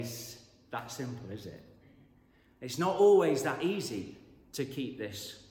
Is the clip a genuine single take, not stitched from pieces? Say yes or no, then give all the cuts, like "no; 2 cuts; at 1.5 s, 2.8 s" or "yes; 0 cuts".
yes; 0 cuts